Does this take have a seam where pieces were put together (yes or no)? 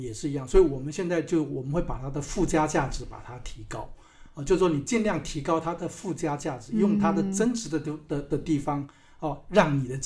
no